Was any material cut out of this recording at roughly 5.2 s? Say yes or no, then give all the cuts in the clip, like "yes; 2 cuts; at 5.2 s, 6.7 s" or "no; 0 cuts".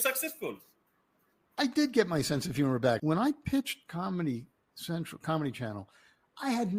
no; 1 cut; at 3.0 s